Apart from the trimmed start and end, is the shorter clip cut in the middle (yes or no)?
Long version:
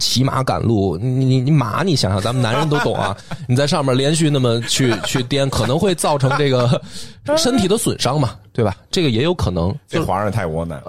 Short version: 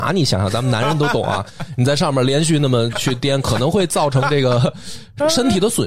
yes